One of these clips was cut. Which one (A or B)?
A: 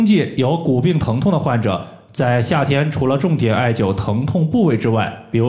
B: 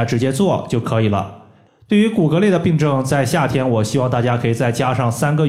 B